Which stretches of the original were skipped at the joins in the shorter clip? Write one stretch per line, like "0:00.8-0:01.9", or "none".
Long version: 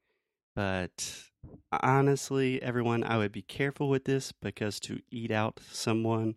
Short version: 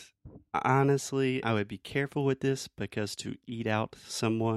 0:02.6-0:03.1